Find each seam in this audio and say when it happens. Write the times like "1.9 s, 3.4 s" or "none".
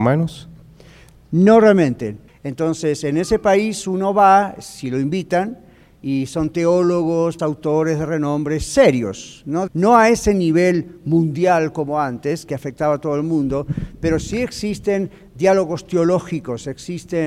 2.3 s, 7.4 s, 9.7 s